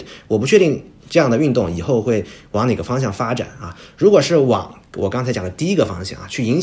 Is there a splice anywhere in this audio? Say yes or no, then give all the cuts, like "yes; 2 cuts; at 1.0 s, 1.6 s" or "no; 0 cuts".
no; 0 cuts